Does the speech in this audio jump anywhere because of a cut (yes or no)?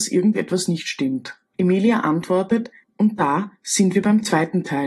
yes